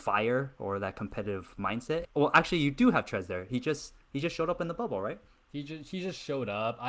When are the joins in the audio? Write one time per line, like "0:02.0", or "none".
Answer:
0:02.0